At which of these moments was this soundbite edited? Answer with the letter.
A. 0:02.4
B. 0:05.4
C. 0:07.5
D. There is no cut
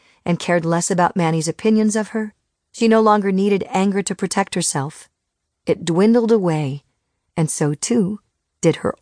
D